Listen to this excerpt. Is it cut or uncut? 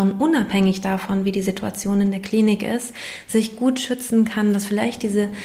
uncut